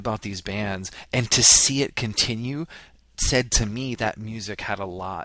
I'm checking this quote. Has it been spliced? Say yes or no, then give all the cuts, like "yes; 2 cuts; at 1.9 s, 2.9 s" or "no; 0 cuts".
yes; 1 cut; at 3.9 s